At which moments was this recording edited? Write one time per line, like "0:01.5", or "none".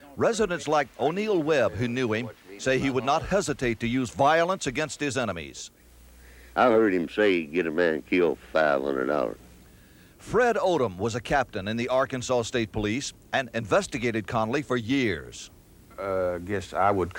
none